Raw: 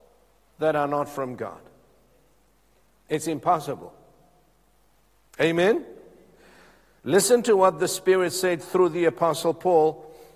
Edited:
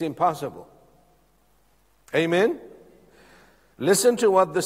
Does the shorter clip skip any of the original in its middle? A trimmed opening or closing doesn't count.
no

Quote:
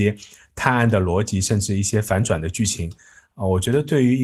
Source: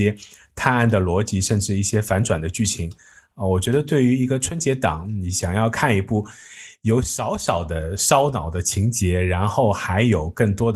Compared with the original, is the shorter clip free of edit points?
yes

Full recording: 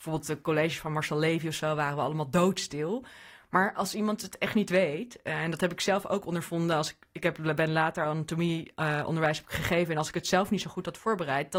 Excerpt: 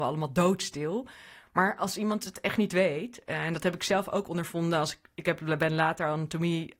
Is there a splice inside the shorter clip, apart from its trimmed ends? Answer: no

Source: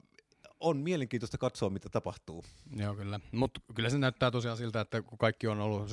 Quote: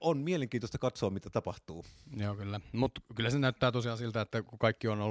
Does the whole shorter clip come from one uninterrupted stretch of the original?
yes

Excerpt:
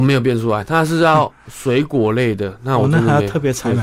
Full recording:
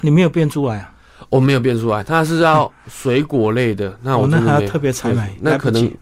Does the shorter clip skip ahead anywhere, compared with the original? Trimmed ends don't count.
no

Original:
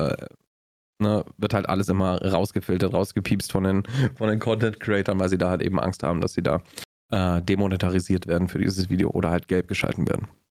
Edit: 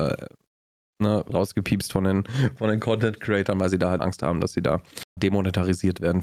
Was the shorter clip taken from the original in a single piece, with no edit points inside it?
no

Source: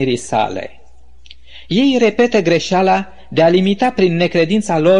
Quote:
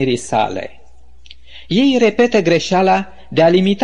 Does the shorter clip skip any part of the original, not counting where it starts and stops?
no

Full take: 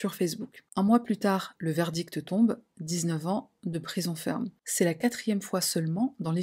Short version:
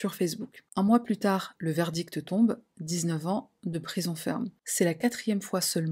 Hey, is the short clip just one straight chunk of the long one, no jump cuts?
yes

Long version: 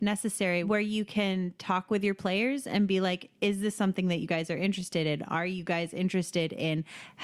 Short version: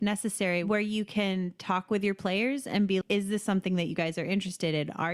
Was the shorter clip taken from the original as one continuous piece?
no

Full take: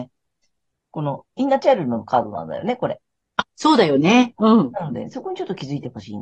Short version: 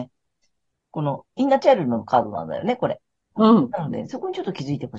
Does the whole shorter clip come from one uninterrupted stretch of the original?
no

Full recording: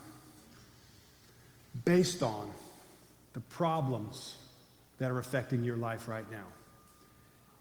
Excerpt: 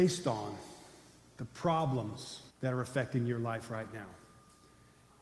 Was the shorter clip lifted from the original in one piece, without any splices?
no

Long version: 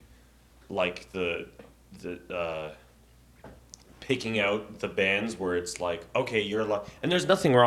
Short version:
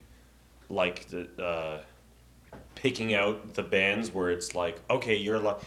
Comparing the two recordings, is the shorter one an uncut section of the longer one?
no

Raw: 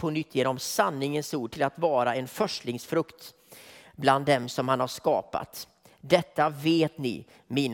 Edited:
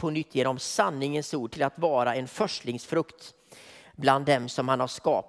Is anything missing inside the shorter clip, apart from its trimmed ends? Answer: no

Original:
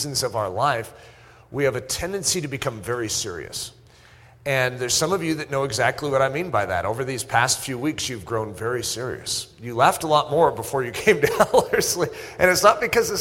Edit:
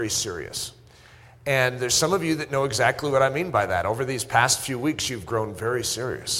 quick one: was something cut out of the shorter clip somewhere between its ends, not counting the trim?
no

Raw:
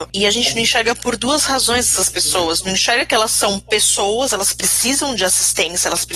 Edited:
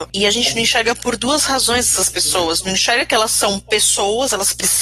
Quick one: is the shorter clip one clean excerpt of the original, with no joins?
yes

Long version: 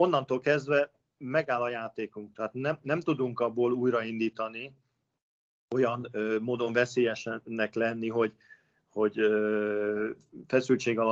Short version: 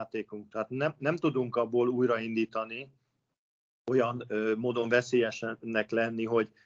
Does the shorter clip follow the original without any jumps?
yes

